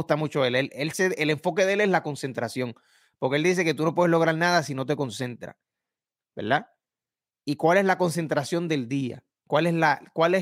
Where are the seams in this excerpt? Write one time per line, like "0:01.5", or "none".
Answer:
none